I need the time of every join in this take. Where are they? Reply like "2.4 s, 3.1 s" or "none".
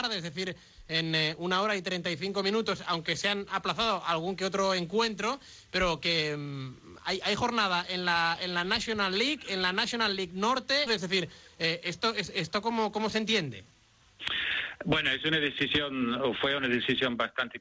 10.9 s

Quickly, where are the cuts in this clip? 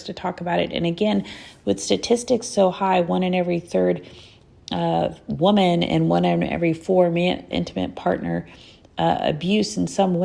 7.5 s

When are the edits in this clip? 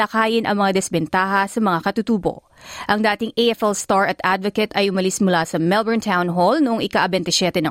2.9 s

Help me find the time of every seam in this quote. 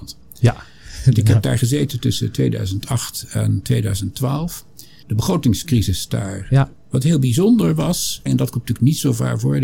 6.8 s, 8.3 s

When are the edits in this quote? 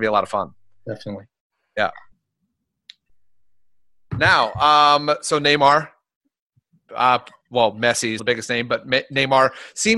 8.2 s

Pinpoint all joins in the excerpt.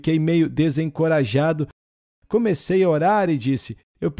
none

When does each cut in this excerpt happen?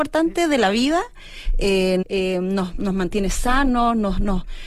2.0 s

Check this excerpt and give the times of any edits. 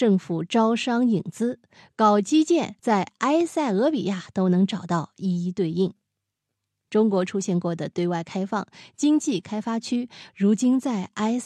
2.8 s, 10.3 s

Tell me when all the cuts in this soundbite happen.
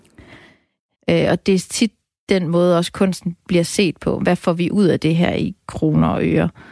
1.0 s

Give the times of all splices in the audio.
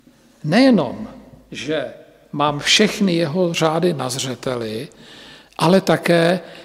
none

